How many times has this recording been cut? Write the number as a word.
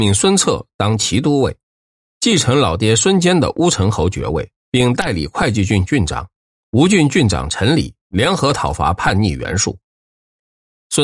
two